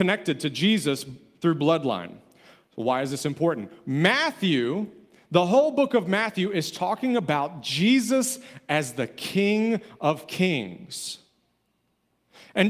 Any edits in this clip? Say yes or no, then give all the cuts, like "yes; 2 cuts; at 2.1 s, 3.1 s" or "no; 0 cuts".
no; 0 cuts